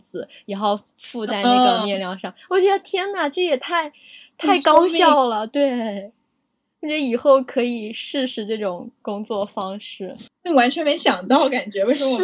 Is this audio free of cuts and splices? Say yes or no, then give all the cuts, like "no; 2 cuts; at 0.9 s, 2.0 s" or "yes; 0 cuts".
yes; 0 cuts